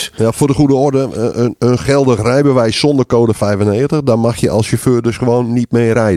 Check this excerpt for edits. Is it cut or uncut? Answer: uncut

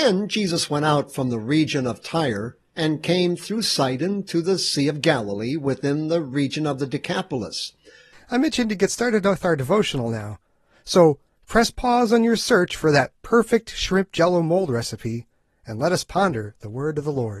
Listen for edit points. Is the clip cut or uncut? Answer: cut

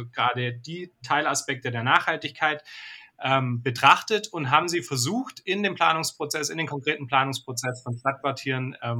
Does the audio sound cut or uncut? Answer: uncut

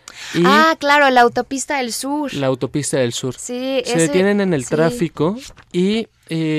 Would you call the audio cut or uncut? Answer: uncut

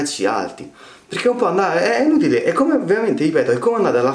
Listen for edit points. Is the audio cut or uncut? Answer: uncut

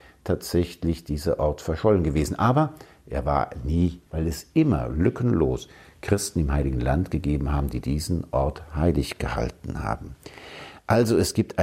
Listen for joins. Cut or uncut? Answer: cut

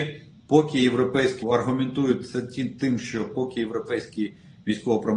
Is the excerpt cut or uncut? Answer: cut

